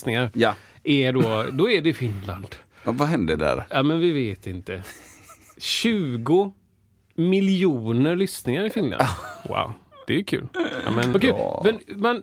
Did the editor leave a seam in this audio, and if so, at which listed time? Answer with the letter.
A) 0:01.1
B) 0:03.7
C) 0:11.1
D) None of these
C